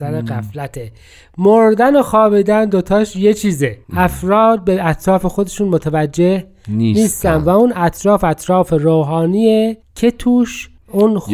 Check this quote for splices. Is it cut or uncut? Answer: cut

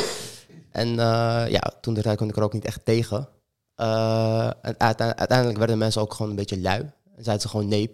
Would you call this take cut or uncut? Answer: uncut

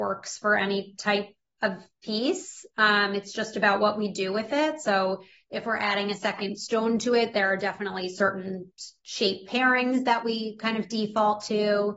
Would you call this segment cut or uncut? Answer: uncut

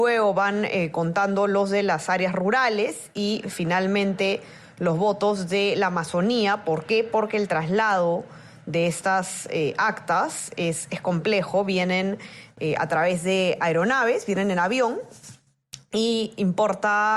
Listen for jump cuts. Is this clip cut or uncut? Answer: uncut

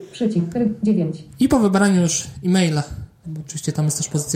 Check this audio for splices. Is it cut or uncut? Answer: cut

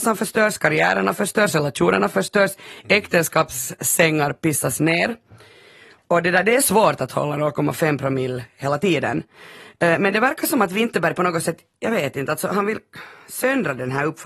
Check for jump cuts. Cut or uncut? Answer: uncut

